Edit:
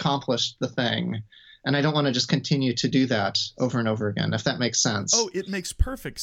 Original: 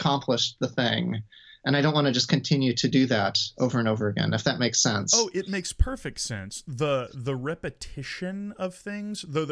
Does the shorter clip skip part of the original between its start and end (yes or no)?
no